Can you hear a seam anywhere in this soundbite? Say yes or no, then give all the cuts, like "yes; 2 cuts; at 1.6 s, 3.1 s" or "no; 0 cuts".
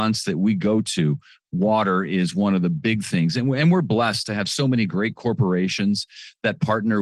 no; 0 cuts